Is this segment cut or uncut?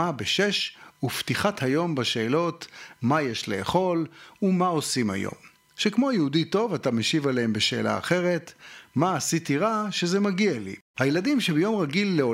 cut